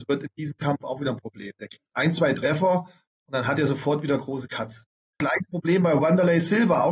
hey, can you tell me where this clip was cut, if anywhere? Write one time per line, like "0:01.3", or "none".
0:05.2